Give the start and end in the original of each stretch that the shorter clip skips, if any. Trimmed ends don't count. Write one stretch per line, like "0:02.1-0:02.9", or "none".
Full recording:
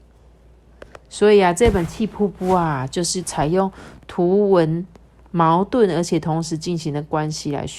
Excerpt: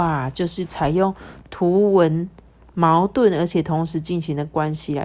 none